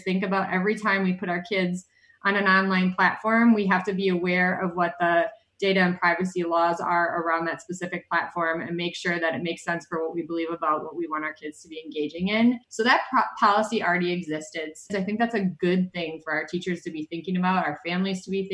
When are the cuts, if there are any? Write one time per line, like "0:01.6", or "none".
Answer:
0:12.6
0:14.9